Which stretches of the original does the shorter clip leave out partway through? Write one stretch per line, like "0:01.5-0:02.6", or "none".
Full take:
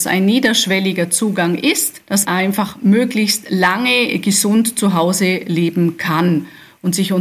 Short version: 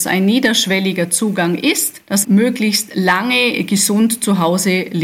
0:02.2-0:02.8